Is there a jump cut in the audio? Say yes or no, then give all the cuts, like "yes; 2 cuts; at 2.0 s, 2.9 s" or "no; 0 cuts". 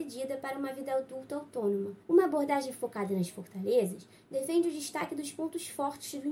yes; 1 cut; at 2.0 s